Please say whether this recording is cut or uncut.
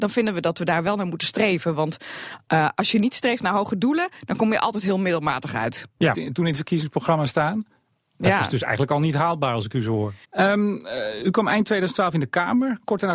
cut